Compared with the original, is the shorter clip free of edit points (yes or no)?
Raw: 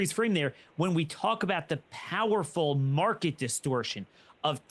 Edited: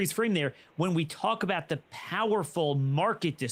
yes